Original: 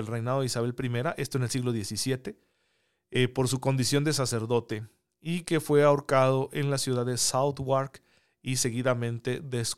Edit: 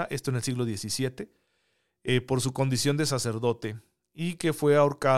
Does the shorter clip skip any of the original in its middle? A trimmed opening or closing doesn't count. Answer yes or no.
no